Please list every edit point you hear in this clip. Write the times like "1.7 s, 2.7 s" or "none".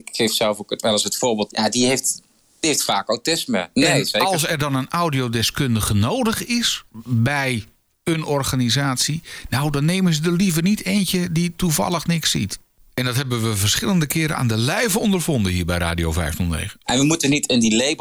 1.5 s, 3.7 s, 16.8 s